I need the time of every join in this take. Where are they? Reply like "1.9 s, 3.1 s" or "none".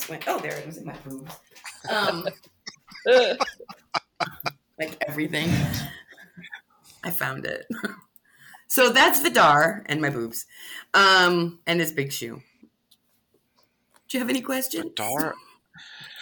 11.6 s